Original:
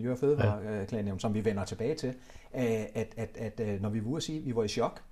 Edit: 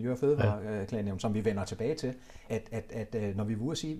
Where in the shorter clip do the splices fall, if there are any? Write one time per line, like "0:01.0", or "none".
0:02.5